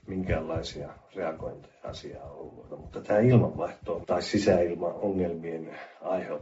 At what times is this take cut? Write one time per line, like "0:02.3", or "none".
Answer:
0:02.7
0:04.0